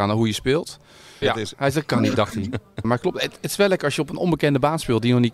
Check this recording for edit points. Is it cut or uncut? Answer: cut